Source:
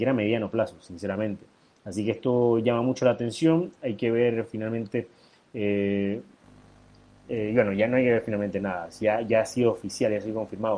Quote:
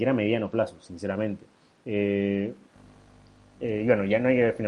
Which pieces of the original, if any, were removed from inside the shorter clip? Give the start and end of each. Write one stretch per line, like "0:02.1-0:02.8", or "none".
0:01.7-0:05.4